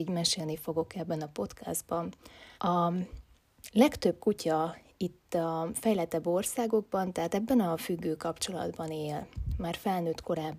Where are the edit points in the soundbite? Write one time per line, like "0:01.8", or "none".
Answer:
0:02.6